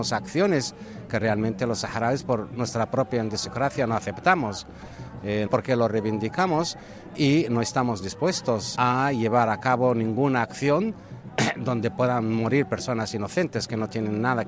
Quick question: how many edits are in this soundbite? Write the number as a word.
two